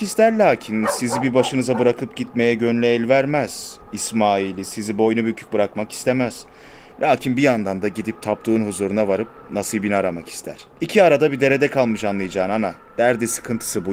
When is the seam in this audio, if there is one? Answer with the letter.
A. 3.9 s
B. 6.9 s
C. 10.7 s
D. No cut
C